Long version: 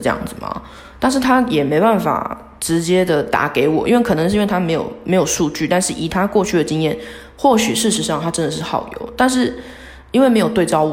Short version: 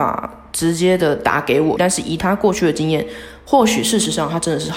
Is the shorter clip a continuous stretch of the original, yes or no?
no